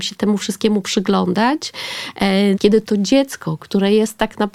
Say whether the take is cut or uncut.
cut